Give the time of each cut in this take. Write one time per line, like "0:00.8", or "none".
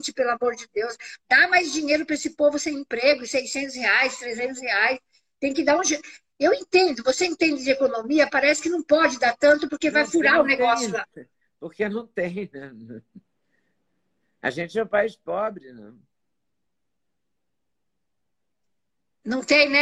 none